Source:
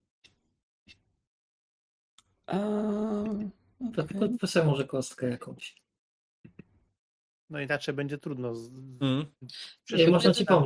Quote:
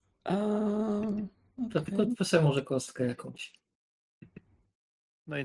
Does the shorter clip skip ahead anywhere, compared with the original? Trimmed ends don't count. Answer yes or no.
no